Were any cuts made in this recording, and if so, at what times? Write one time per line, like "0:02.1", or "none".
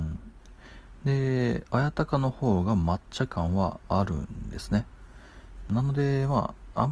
0:05.7